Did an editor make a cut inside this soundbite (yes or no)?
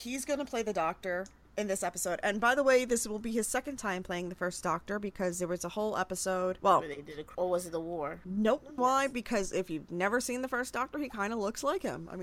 yes